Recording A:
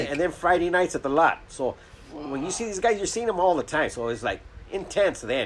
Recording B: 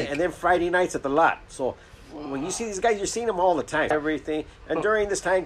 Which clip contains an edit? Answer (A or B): B